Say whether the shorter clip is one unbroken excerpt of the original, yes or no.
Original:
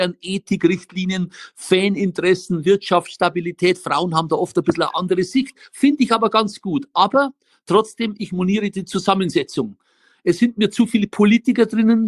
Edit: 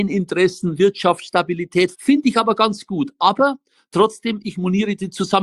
no